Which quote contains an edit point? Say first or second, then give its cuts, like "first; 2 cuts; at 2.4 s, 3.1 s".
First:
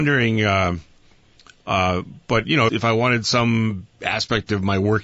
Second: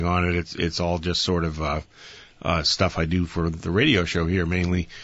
first; 1 cut; at 2.7 s